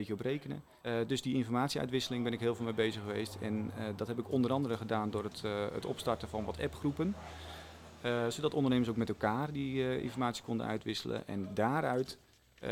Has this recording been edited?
no; 0 cuts

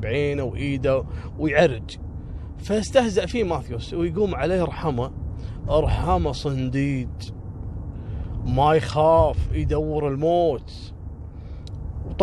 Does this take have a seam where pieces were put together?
no; 0 cuts

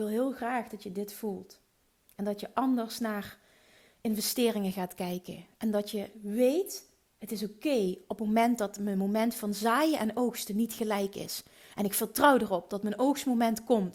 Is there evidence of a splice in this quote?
no; 0 cuts

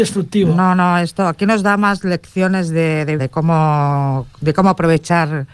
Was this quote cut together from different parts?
yes; 1 cut; at 3.2 s

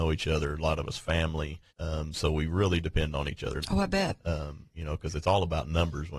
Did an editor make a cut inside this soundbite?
yes; 2 cuts; at 1.7 s, 3.6 s

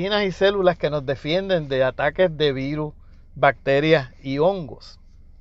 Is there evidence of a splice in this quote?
no; 0 cuts

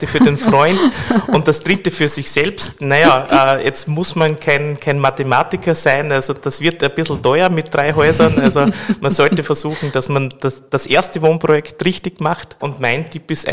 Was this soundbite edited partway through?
yes; 1 cut; at 12.6 s

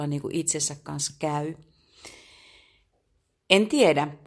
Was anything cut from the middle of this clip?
no; 0 cuts

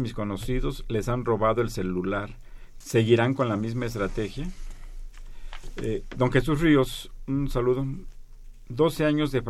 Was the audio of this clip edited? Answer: yes; 1 cut; at 2.8 s

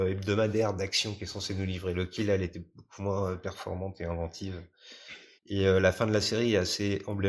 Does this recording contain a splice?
yes; 1 cut; at 5.4 s

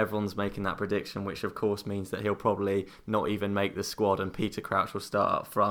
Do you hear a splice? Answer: no; 0 cuts

